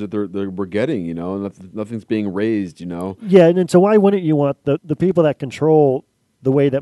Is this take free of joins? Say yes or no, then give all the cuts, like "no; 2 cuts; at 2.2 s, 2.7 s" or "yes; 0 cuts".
no; 1 cut; at 4.8 s